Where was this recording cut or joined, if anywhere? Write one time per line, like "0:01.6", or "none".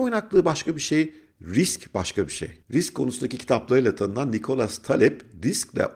0:02.6